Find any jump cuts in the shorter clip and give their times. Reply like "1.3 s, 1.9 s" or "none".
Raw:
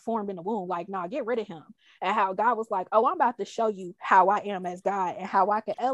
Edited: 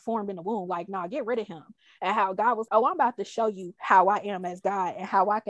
2.7 s